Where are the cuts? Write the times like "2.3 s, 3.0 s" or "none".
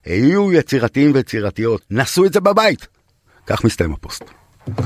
1.8 s

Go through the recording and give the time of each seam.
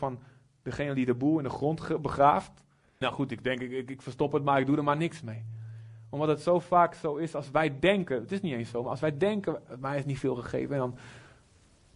3.0 s

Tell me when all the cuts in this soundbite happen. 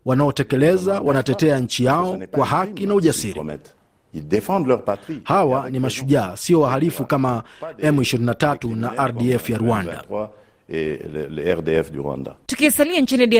none

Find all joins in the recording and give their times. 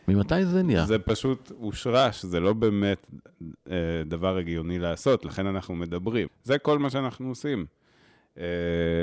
6.3 s

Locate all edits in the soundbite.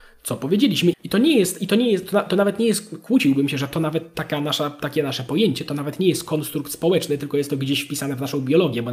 0.9 s

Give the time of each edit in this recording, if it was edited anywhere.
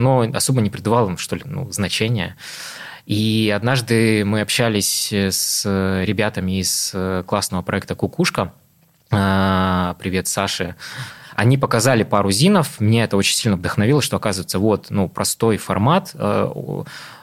1.4 s

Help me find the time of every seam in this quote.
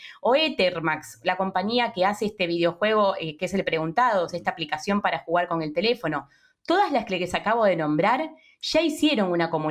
none

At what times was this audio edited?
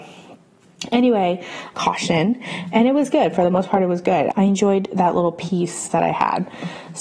1.7 s, 4.3 s

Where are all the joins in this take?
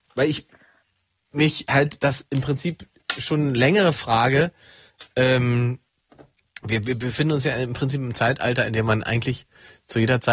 none

